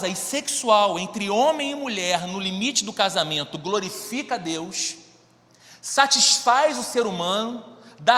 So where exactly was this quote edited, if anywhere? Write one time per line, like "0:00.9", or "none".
none